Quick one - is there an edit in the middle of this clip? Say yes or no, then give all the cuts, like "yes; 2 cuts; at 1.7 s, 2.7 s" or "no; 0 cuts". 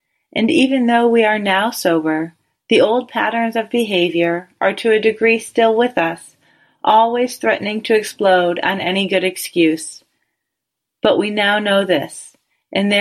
no; 0 cuts